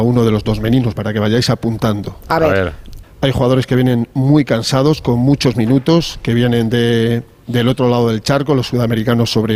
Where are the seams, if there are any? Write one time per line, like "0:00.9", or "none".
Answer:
0:01.0
0:03.0